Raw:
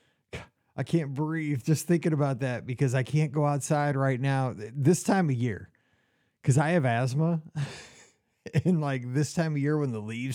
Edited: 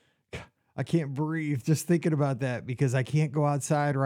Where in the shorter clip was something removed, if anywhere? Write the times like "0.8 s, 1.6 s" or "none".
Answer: none